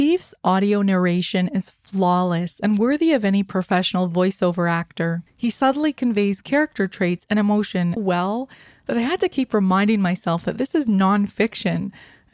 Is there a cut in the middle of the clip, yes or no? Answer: yes